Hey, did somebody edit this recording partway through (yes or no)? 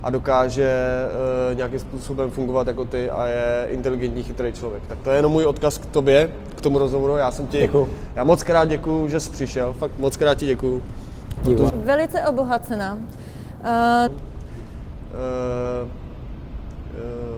yes